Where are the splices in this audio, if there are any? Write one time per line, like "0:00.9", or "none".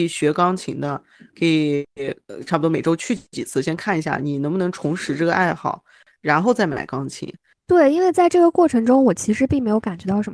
0:07.5